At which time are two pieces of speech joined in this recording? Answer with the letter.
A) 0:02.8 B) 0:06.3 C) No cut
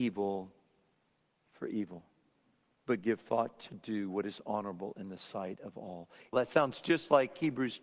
B